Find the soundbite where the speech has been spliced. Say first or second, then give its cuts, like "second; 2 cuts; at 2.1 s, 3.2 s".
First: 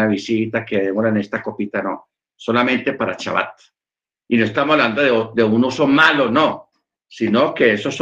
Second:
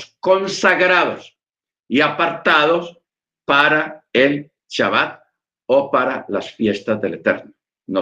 first; 1 cut; at 4.2 s